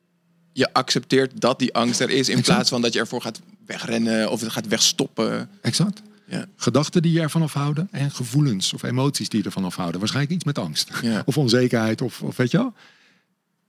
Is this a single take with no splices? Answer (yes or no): no